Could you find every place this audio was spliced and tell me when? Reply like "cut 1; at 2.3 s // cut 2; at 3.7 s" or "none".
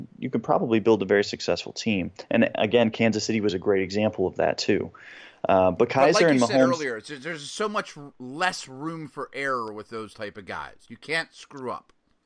none